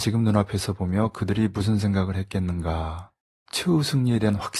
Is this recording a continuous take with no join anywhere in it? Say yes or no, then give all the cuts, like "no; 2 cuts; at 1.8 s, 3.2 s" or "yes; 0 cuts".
yes; 0 cuts